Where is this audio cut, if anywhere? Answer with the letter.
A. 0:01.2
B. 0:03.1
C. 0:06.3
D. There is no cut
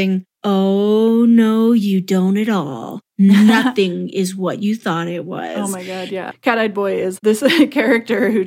C